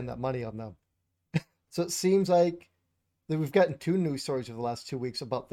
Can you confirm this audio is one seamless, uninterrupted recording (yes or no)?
no